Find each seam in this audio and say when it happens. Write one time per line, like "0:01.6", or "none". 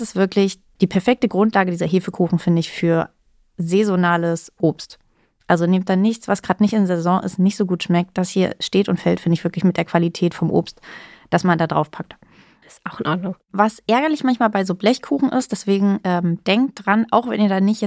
0:12.6